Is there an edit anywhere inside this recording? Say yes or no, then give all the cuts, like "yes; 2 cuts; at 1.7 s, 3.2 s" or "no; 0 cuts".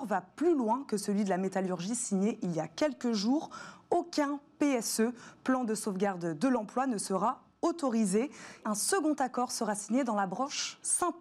yes; 1 cut; at 8.6 s